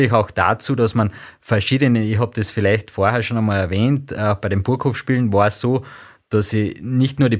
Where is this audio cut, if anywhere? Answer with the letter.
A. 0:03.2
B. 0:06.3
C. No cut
C